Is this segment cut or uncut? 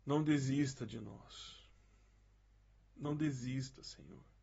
cut